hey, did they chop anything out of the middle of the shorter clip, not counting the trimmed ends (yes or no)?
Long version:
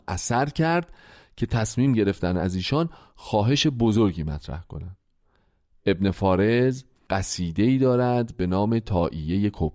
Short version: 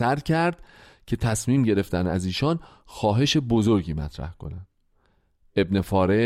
no